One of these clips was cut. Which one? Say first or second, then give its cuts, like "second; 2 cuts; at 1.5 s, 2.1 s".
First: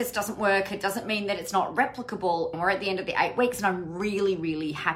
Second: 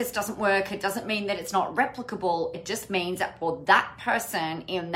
first; 1 cut; at 2.5 s